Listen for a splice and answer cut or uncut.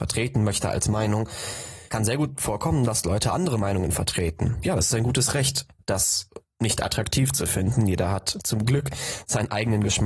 cut